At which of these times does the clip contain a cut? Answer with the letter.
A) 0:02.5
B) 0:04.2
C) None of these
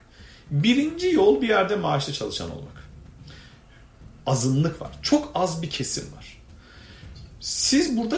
B